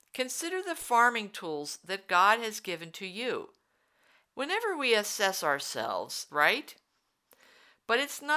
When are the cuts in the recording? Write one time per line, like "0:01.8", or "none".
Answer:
0:04.3
0:06.3